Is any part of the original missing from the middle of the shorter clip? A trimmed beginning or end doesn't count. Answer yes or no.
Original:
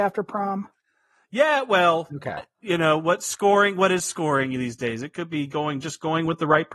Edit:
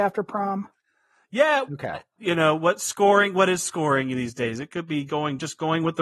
yes